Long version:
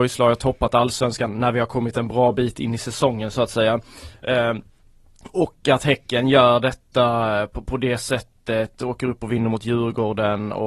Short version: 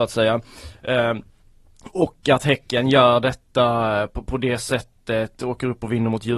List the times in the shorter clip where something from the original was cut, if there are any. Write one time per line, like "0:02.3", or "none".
none

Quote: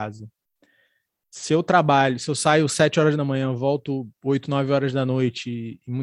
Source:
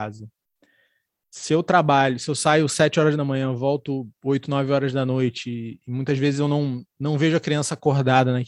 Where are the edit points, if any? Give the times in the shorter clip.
none

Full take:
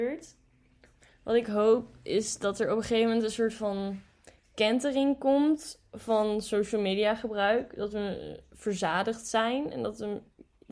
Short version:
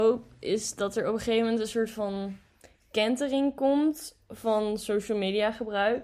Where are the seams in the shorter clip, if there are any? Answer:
none

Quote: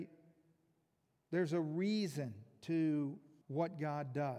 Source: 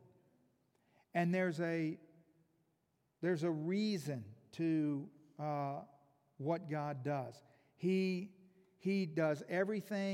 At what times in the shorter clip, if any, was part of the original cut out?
0:03.4

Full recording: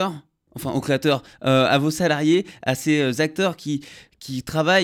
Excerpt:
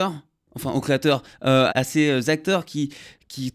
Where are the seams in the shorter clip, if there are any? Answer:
0:01.7

